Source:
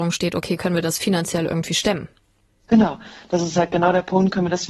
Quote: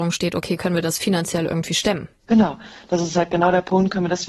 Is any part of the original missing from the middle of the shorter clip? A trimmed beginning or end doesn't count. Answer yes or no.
yes